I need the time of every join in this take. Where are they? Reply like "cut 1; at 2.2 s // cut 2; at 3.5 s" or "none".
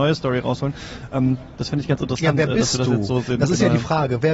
none